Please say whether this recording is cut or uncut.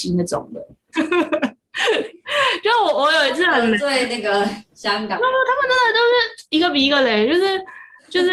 cut